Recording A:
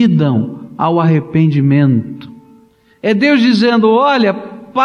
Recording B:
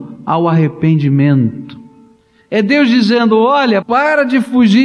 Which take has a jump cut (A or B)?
B